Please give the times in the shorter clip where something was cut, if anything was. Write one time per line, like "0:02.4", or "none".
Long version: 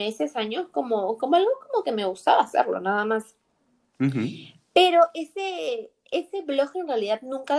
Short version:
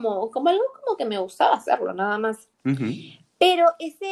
0:02.5